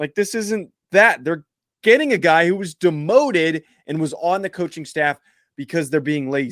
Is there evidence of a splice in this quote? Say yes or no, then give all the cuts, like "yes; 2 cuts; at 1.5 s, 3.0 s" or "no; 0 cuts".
no; 0 cuts